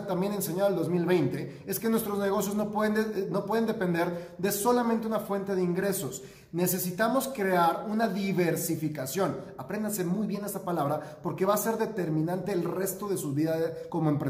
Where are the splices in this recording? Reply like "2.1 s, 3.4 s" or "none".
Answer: none